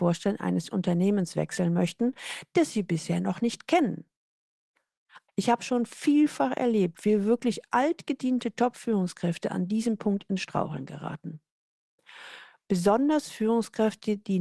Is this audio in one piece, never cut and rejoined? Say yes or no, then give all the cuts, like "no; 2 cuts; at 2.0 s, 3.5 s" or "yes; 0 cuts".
no; 1 cut; at 5.3 s